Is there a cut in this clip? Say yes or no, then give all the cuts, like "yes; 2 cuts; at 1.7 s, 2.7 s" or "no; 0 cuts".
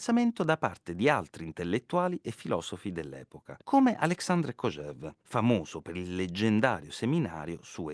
yes; 2 cuts; at 3.6 s, 5.2 s